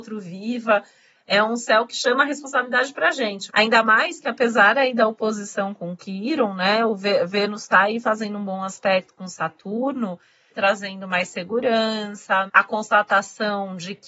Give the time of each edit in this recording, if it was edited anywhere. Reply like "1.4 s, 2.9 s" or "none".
3.5 s, 10.5 s, 12.5 s